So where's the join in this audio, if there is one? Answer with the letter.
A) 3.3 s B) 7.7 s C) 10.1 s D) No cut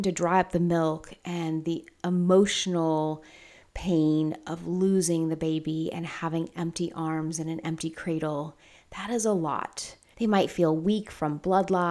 C